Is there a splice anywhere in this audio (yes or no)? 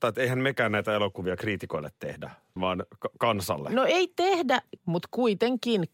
yes